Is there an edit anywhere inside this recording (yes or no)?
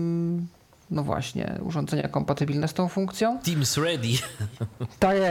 no